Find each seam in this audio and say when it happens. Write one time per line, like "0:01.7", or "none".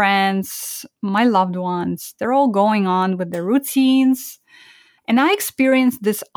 0:05.0